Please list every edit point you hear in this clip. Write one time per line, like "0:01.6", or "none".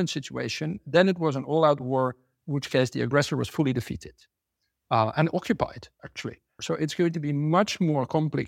0:06.6